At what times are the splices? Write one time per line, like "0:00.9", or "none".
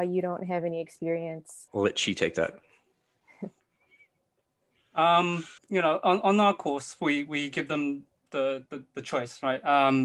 0:01.7
0:05.6